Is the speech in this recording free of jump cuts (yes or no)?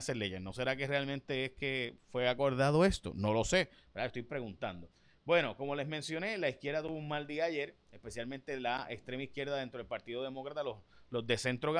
yes